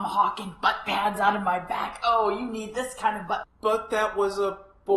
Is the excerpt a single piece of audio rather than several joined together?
no; 1 cut; at 3.4 s

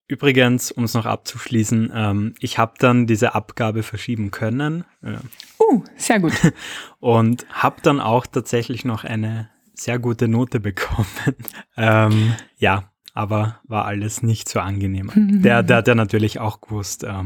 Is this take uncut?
no; 2 cuts; at 11.5 s, 15.1 s

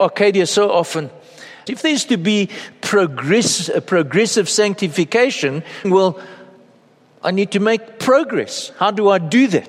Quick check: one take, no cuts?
no; 2 cuts; at 1.7 s, 5.8 s

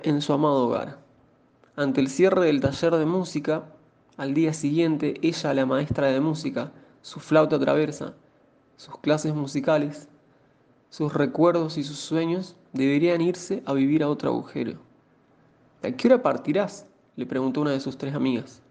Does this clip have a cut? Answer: no; 0 cuts

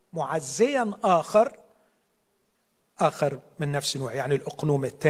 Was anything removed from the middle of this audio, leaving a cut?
no; 0 cuts

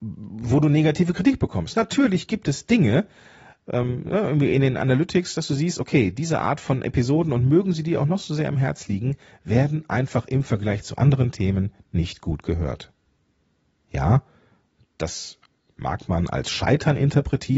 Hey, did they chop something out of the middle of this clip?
no; 0 cuts

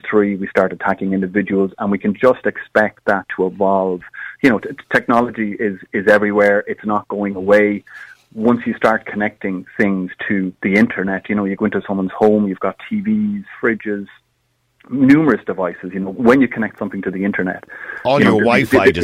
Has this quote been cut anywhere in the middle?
no; 0 cuts

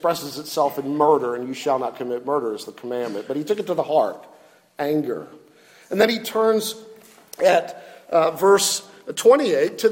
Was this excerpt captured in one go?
yes; 0 cuts

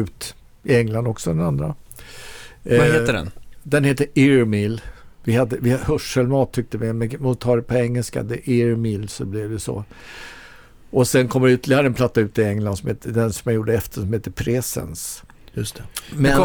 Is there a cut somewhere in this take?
no; 0 cuts

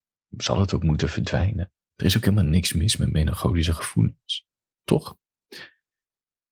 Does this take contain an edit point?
no; 0 cuts

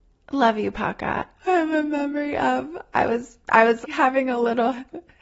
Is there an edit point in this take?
yes; 2 cuts; at 1.3 s, 3.8 s

